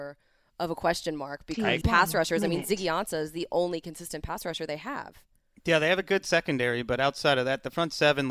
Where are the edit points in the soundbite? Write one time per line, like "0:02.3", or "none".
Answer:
0:01.8